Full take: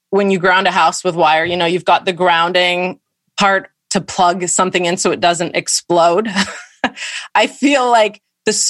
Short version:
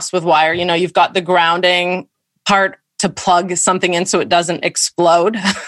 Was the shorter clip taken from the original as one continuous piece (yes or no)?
yes